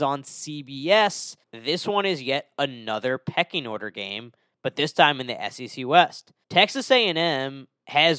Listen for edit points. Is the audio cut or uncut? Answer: cut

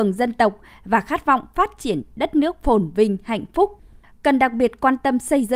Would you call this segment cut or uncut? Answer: uncut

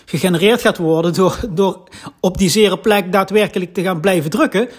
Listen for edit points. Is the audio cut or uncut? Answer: uncut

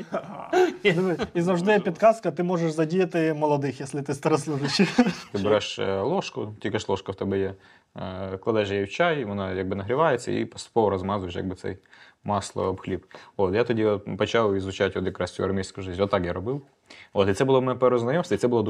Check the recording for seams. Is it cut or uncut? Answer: uncut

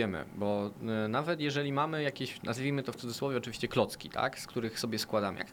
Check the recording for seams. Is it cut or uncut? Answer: uncut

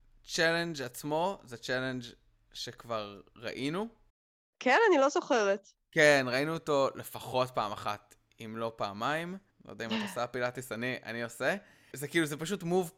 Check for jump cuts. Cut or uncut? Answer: cut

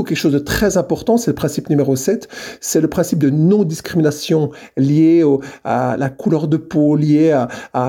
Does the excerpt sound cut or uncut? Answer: uncut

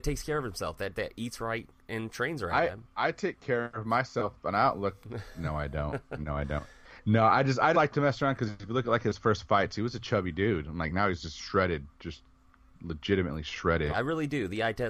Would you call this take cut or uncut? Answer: cut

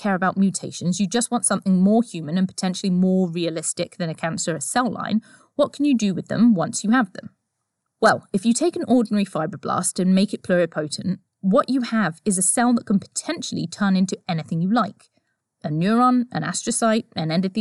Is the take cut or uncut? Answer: uncut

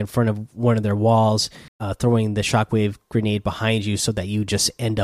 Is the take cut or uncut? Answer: cut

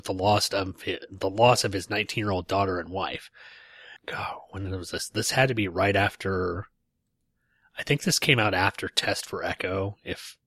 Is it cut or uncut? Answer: cut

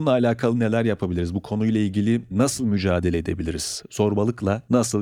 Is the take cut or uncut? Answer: uncut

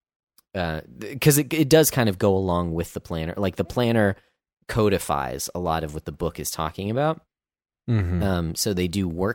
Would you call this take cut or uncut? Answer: uncut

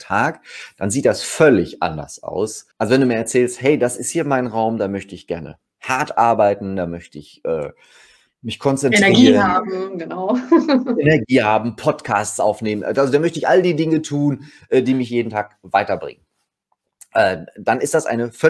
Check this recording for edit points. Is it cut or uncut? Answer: cut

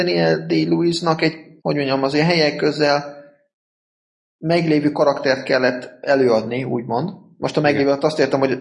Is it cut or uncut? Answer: cut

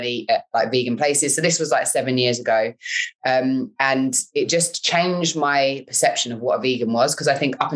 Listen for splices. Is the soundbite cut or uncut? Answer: uncut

